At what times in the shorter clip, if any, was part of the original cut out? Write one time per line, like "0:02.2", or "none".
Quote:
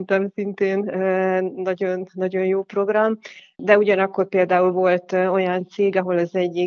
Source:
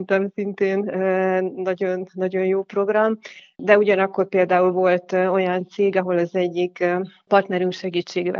none